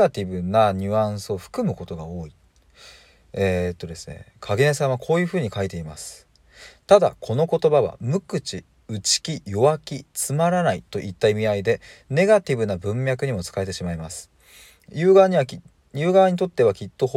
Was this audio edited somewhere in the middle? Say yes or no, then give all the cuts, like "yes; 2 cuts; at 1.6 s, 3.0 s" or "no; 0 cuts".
no; 0 cuts